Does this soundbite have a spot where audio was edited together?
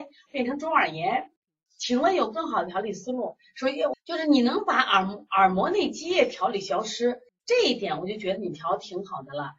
yes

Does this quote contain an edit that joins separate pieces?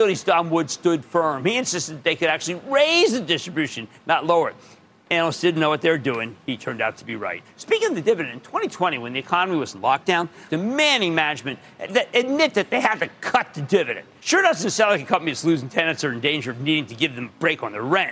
yes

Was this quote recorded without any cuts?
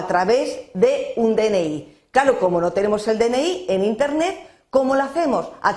yes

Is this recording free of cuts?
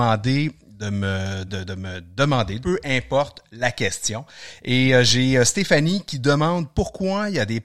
no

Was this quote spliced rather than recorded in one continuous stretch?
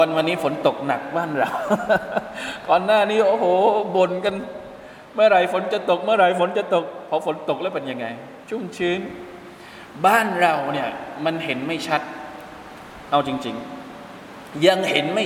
yes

